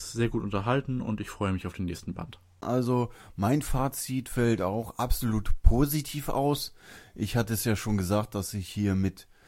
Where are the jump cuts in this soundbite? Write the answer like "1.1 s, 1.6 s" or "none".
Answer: 2.6 s